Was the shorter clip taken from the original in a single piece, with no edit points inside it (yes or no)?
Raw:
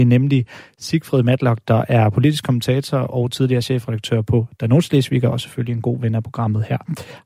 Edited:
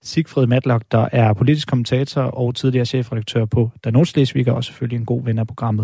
yes